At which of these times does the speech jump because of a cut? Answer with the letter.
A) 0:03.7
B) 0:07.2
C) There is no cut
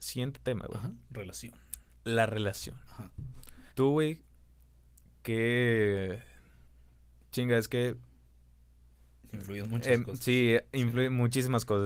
A